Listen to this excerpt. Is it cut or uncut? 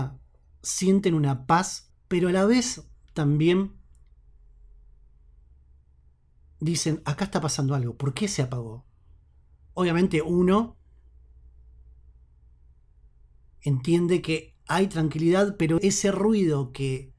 cut